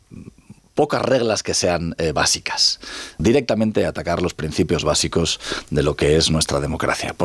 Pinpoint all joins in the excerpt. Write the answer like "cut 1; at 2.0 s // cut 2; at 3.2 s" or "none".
cut 1; at 3.2 s

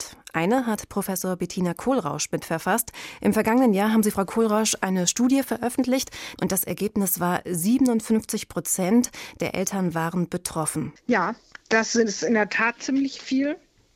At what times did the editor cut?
cut 1; at 3.2 s // cut 2; at 6.4 s // cut 3; at 11.0 s

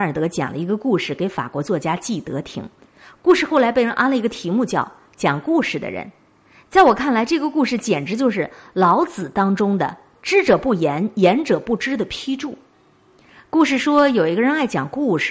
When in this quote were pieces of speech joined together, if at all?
none

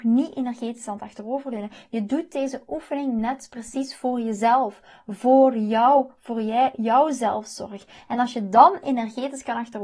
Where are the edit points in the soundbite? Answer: none

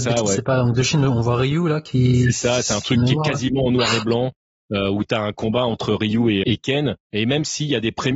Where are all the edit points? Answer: cut 1; at 6.4 s

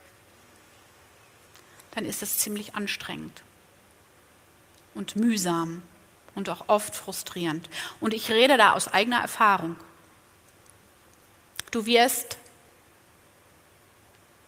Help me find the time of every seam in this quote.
cut 1; at 11.7 s

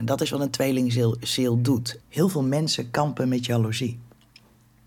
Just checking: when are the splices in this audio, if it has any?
cut 1; at 2.0 s

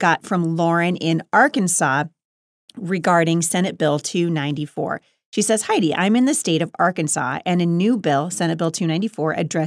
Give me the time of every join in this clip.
none

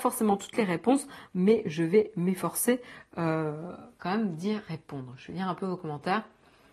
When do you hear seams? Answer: none

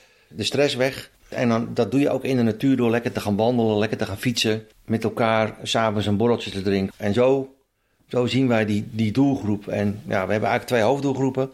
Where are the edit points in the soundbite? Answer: none

